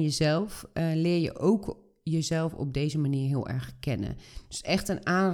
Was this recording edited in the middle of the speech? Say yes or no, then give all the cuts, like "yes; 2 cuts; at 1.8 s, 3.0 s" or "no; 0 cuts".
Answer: no; 0 cuts